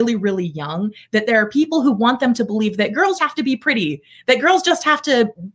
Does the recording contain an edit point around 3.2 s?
yes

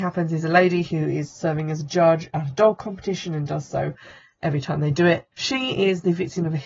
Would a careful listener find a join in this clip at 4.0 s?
no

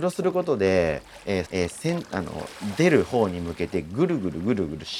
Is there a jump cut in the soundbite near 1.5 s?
yes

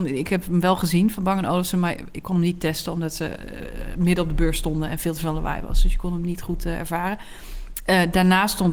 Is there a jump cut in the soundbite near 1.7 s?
no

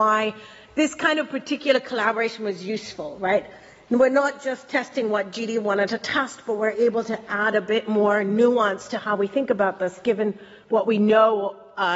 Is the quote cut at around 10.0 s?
no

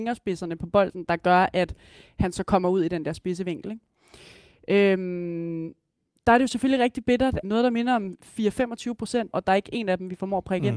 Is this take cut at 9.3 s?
yes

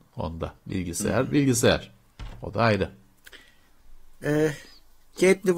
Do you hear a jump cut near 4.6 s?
no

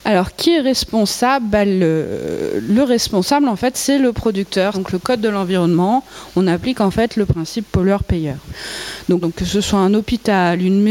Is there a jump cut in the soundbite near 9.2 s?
yes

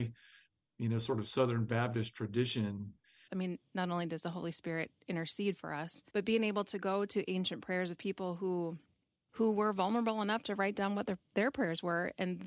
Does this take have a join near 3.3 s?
yes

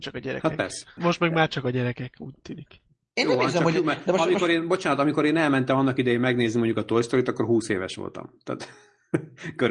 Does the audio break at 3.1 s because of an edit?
no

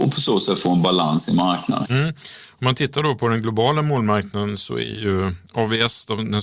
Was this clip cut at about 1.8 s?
yes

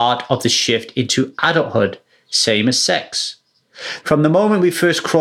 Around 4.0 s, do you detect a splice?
yes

